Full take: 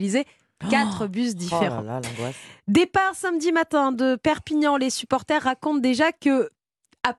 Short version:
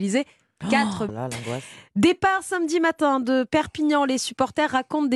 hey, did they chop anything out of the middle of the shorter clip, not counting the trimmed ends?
yes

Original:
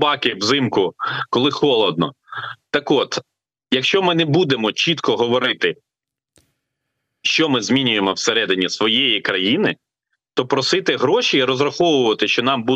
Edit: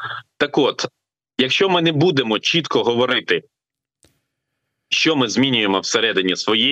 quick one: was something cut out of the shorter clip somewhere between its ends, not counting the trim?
no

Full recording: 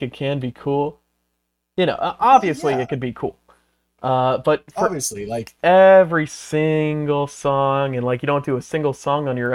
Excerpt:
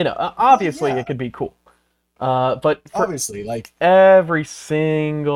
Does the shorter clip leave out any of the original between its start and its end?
no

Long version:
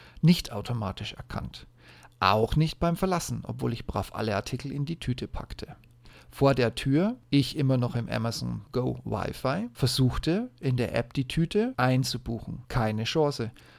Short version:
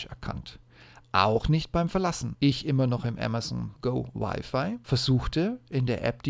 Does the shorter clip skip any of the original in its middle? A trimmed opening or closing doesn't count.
yes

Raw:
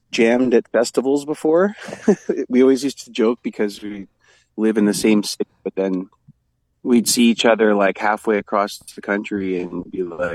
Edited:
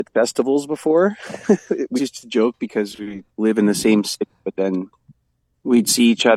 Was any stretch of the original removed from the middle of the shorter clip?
yes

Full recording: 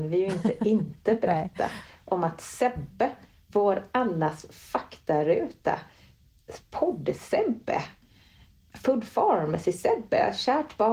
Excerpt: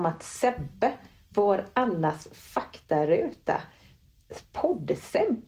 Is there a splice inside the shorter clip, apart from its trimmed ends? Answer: no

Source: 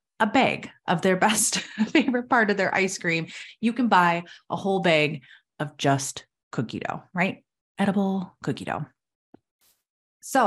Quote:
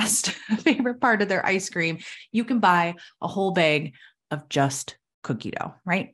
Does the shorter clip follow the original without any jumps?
yes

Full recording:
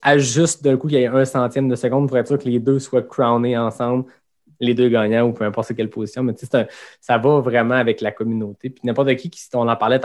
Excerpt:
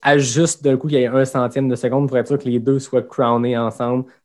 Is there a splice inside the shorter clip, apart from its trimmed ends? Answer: no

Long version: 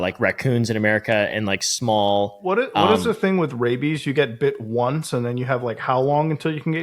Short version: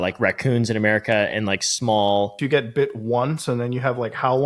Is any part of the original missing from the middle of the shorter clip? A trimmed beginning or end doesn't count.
yes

